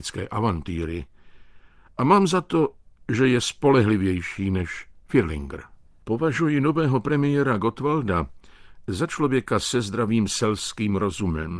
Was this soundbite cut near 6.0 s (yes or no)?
yes